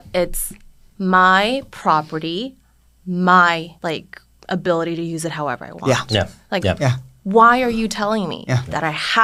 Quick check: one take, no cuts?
no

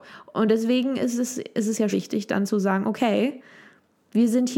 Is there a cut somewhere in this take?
yes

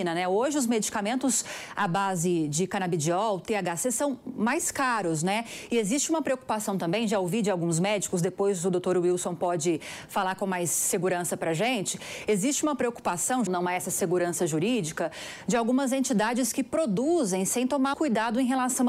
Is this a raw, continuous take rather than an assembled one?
no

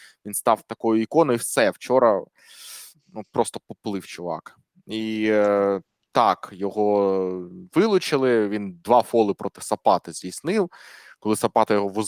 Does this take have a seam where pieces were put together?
no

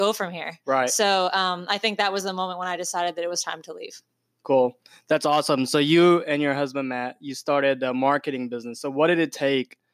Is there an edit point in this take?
no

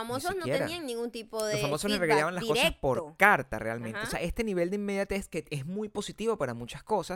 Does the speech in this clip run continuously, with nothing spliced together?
yes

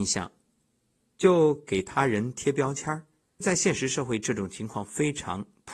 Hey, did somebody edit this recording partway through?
yes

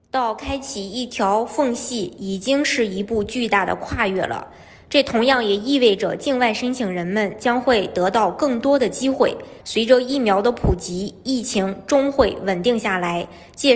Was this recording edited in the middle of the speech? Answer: yes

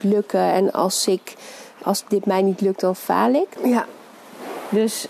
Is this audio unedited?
no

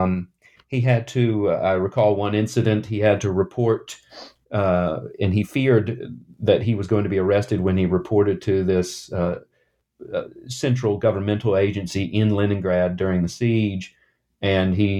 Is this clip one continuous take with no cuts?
yes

